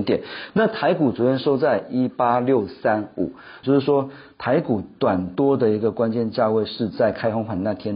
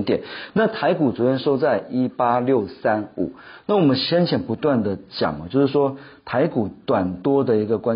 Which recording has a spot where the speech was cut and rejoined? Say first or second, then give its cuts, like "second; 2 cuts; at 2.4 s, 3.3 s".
first; 1 cut; at 3.6 s